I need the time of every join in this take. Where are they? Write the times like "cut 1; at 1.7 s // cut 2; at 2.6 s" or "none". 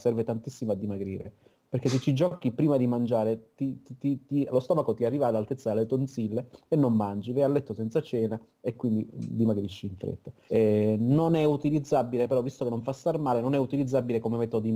cut 1; at 10.5 s